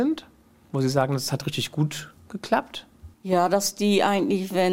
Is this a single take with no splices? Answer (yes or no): no